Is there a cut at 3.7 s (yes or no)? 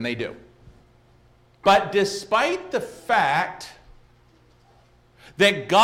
no